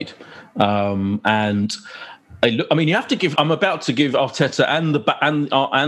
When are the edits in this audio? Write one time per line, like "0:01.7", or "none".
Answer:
0:03.4